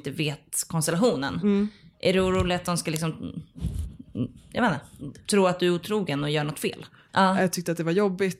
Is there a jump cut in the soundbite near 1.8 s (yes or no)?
no